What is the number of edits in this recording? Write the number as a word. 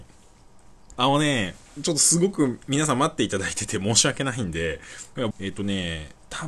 two